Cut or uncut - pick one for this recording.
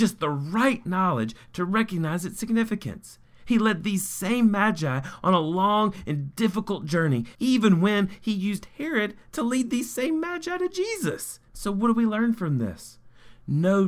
cut